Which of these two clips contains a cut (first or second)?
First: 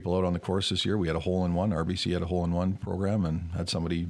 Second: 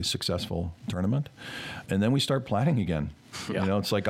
second